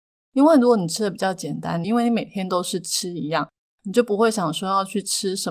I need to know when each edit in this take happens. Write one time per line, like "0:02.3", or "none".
0:01.8